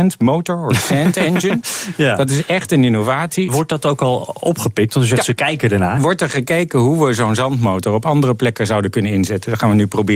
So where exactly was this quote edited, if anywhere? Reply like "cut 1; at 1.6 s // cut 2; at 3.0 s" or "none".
cut 1; at 3.5 s // cut 2; at 6.0 s

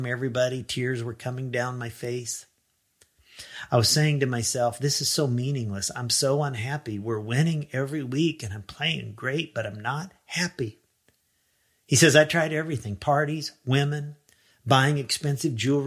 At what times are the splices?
none

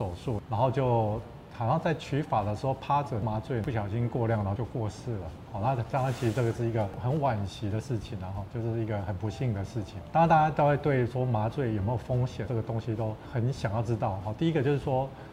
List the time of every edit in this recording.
cut 1; at 4.6 s // cut 2; at 12.5 s

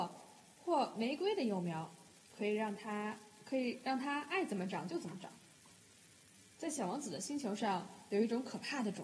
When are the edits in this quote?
cut 1; at 6.6 s

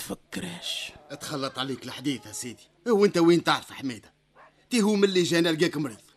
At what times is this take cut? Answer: cut 1; at 2.8 s

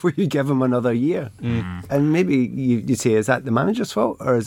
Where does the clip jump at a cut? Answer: none

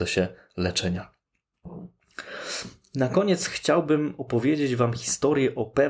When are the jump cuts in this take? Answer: none

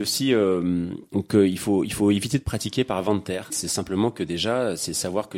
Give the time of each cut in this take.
cut 1; at 3.5 s

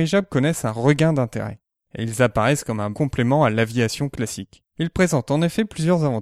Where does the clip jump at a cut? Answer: cut 1; at 2.9 s // cut 2; at 4.7 s

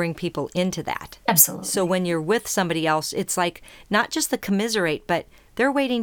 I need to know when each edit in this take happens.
none

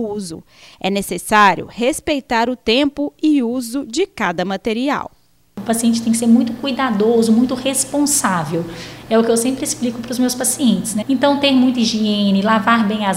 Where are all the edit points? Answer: cut 1; at 11.0 s

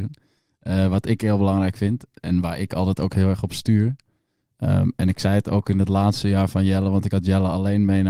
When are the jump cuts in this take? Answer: none

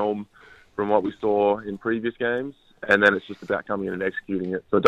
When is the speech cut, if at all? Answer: none

